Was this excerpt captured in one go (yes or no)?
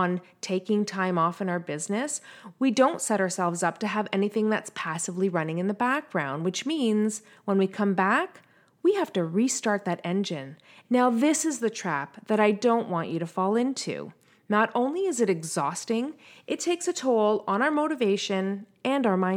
no